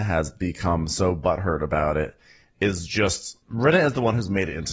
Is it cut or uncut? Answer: cut